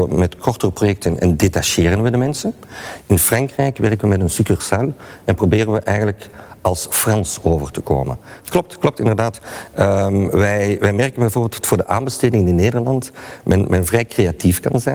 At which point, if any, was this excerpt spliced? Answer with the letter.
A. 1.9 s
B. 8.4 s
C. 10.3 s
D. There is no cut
B